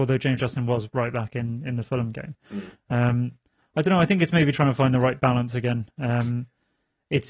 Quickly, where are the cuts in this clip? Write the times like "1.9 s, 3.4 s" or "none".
4.5 s

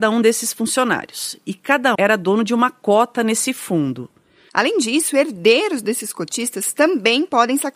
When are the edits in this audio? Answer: 1.9 s, 4.5 s

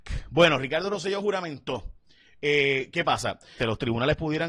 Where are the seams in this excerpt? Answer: 3.6 s

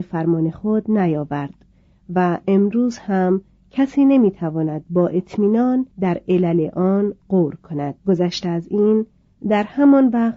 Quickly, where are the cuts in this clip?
5.9 s, 8.0 s

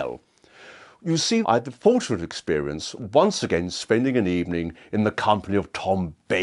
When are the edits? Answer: 1.4 s

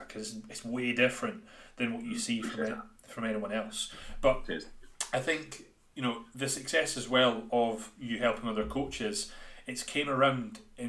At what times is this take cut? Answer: none

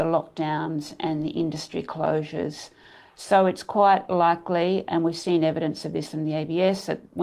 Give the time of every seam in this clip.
none

